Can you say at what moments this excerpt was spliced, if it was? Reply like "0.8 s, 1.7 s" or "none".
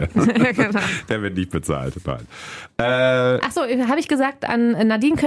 none